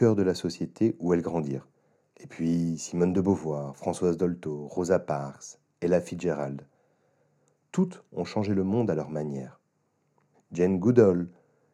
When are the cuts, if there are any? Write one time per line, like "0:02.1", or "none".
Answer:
0:02.1
0:10.3